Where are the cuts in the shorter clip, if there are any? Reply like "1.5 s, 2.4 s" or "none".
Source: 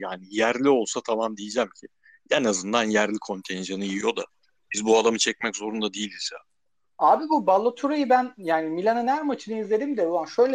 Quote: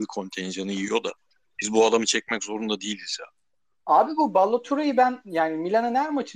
none